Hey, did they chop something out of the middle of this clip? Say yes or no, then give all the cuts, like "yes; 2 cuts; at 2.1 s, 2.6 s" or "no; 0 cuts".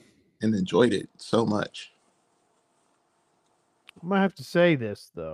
no; 0 cuts